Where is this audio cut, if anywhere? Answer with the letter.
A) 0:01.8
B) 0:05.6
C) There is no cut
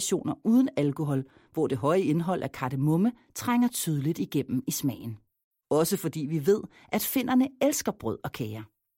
B